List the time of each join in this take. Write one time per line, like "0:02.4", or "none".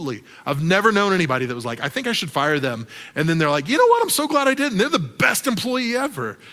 none